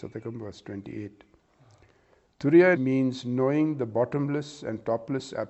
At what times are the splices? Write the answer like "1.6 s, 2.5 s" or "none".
2.7 s

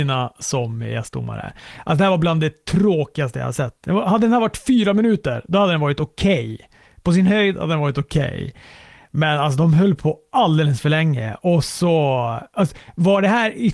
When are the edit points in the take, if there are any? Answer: none

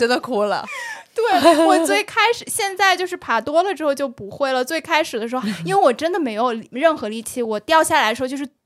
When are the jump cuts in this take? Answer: 5.4 s

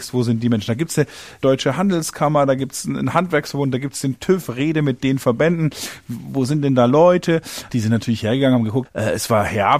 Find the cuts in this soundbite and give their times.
7.7 s, 8.9 s

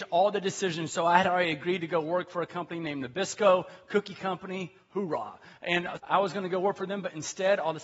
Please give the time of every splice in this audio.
6.0 s

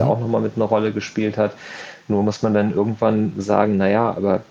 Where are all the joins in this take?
none

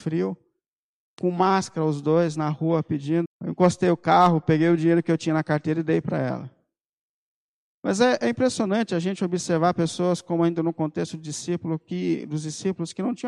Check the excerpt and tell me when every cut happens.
3.2 s

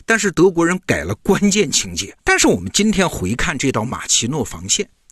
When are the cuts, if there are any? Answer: 2.2 s

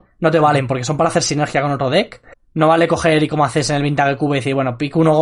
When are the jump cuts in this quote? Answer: 2.3 s

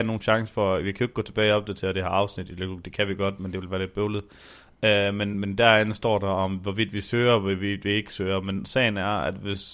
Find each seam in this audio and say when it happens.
5.3 s

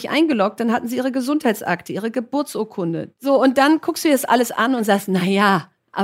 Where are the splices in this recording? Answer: none

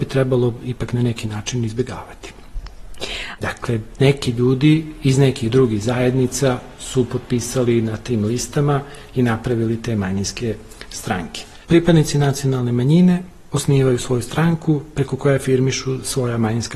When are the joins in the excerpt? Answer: 3.4 s, 11.6 s

